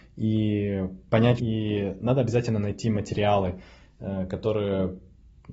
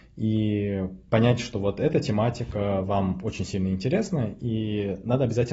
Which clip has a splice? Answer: first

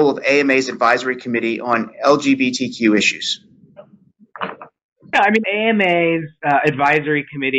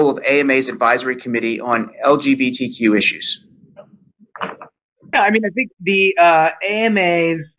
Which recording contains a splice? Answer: first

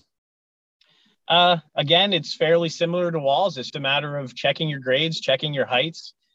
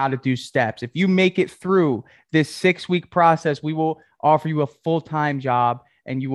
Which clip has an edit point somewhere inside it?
first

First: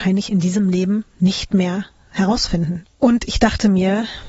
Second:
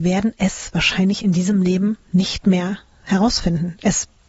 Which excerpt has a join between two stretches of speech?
first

